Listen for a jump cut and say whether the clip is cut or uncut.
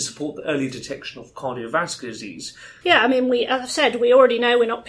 cut